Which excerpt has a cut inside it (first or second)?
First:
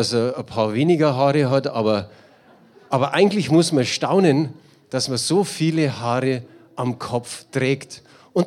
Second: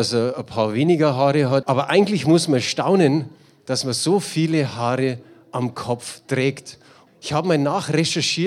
second